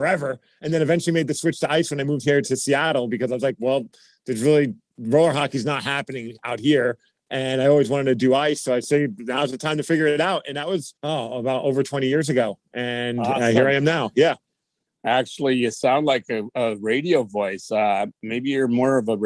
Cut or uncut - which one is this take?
cut